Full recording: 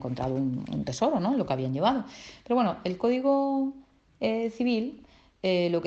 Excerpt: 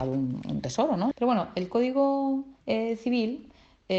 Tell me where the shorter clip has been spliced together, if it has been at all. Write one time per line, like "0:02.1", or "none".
0:01.1
0:02.6

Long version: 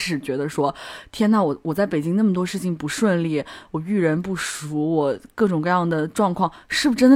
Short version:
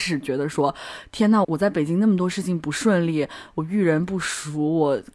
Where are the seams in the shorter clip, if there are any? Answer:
0:01.4

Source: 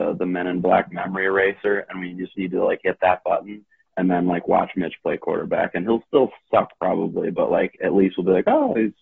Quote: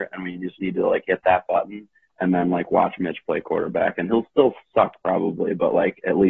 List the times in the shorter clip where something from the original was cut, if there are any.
none

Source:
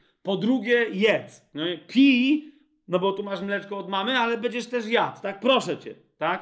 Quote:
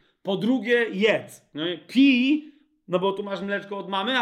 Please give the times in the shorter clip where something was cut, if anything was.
none

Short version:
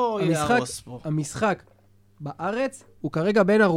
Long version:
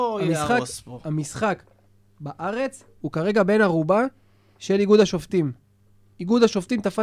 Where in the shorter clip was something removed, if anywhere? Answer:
none

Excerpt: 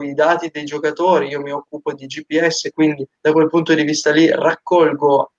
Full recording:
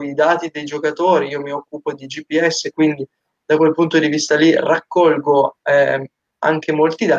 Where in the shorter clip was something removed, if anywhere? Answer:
0:03.2

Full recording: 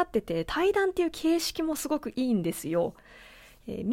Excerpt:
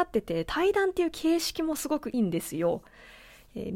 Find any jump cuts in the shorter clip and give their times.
0:02.1

